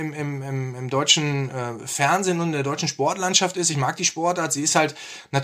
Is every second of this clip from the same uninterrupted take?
yes; 0 cuts

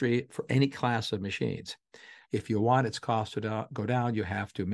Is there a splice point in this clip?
yes; 1 cut; at 2.3 s

